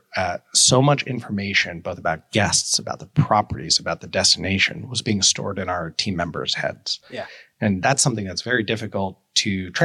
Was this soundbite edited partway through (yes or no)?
no